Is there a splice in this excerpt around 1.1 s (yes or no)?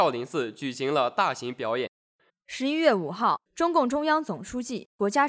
no